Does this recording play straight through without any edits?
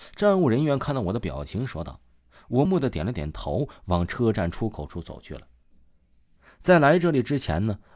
no; 1 cut; at 2.7 s

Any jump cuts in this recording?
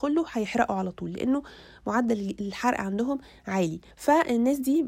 yes; 1 cut; at 3.9 s

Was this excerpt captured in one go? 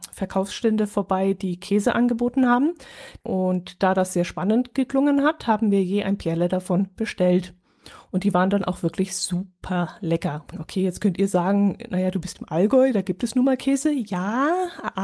no; 2 cuts; at 3.2 s, 10.5 s

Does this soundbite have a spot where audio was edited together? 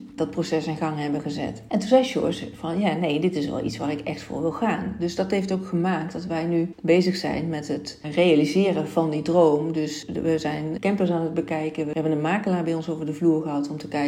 no; 0 cuts

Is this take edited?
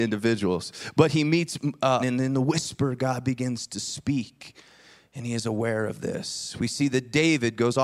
yes; 1 cut; at 2.0 s

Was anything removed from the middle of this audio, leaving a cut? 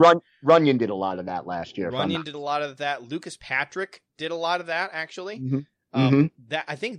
no; 0 cuts

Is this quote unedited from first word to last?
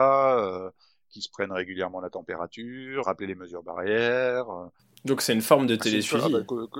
no; 1 cut; at 3.0 s

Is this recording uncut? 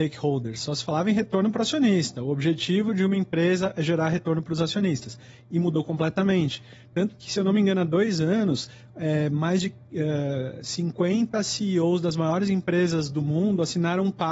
yes; 0 cuts

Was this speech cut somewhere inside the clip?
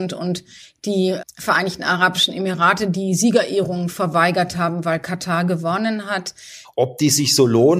yes; 2 cuts; at 1.2 s, 6.6 s

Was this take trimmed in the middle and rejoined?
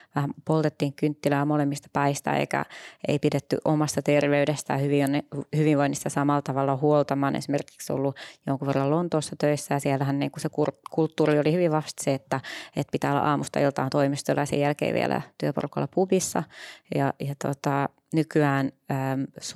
no; 0 cuts

